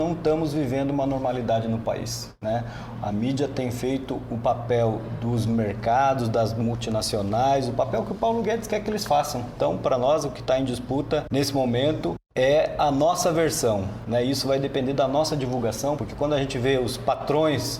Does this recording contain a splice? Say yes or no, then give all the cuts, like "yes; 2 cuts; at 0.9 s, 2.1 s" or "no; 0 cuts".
yes; 1 cut; at 16.0 s